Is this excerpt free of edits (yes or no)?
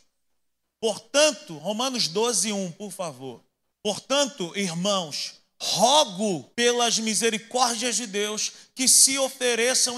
no